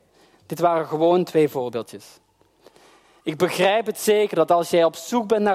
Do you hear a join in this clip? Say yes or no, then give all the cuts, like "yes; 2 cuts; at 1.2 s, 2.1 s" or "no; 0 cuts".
no; 0 cuts